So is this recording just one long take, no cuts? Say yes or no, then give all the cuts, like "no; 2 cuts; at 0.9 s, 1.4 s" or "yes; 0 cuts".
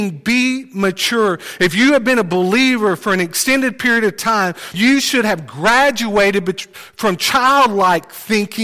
no; 1 cut; at 4.7 s